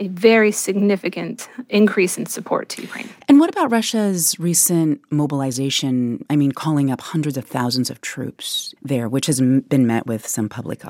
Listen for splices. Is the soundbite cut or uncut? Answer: uncut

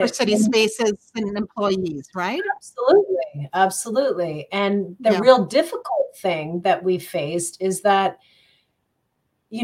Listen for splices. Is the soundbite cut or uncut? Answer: uncut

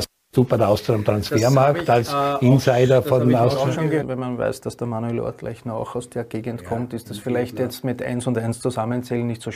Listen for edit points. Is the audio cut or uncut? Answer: cut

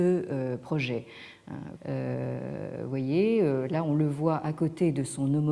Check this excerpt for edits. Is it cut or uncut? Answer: cut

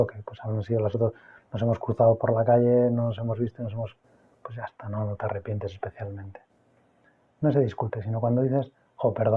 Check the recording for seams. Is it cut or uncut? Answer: uncut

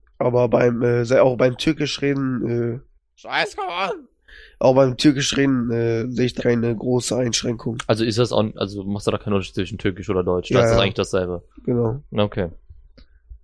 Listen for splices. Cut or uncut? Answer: cut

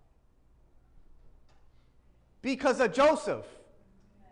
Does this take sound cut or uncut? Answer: uncut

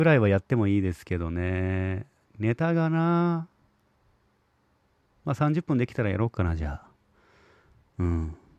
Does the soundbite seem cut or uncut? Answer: uncut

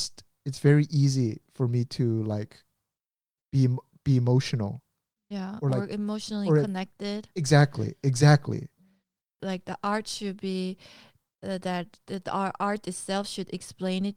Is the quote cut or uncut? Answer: cut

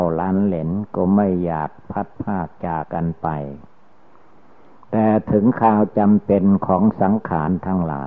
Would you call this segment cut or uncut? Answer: cut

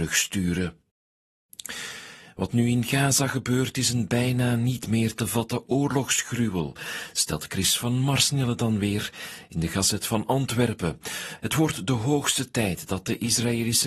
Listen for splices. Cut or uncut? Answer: uncut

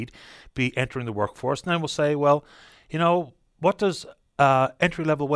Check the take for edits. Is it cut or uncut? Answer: uncut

